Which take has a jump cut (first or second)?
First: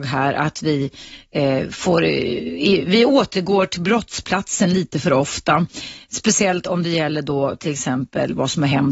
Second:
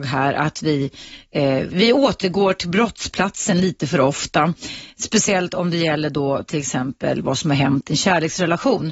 second